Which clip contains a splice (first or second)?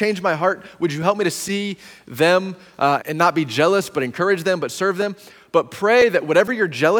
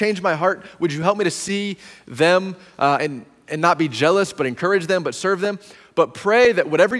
first